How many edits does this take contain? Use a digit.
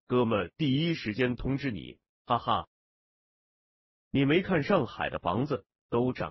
1